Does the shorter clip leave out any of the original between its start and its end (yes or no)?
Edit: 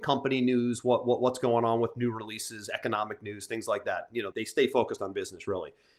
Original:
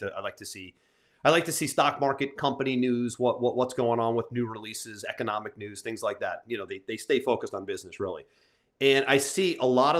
yes